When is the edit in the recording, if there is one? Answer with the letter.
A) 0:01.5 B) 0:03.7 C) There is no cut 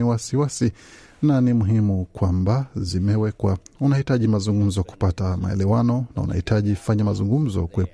B